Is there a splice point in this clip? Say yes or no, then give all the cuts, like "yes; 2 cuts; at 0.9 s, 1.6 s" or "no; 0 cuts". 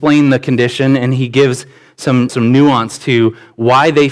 yes; 1 cut; at 2.3 s